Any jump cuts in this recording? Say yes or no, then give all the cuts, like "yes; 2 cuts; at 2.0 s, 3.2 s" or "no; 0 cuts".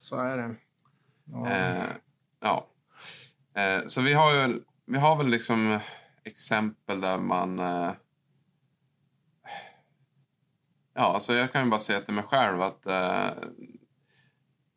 no; 0 cuts